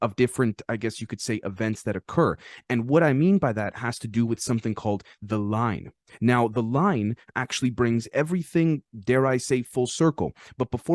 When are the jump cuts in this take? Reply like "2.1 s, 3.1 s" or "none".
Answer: none